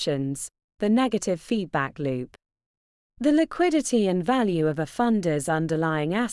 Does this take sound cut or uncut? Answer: uncut